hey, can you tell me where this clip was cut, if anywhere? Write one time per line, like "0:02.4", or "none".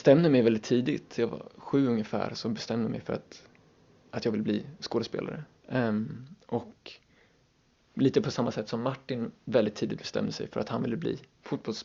none

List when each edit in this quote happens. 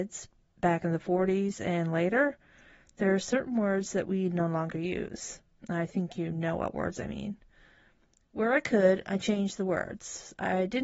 none

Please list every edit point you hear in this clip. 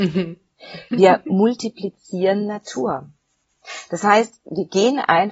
none

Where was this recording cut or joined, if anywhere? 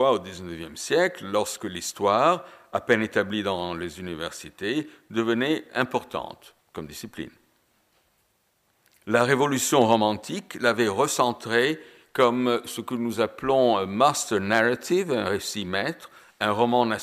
0:06.6

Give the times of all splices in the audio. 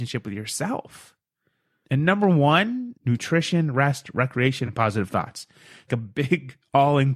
0:02.9
0:04.7
0:05.9

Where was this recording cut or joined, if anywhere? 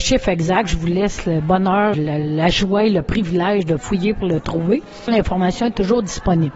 0:01.9
0:05.1

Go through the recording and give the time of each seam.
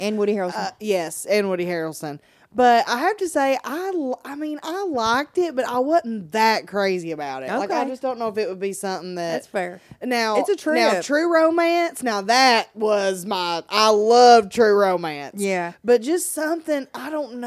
none

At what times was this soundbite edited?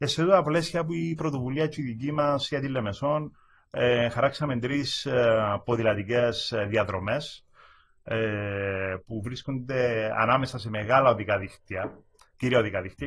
none

